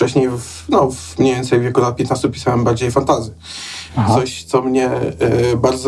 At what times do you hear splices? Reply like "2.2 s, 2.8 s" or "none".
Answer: 3.9 s